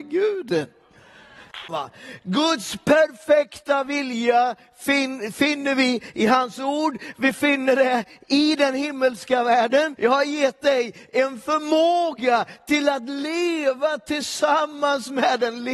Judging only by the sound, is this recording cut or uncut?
cut